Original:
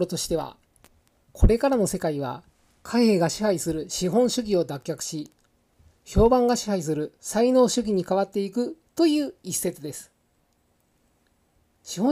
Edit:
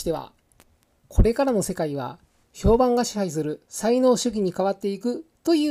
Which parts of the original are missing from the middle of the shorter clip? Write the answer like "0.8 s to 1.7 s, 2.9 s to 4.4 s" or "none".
2.7 s to 5.9 s